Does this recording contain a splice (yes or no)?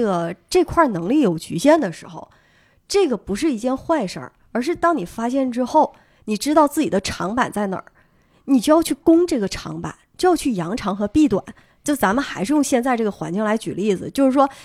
no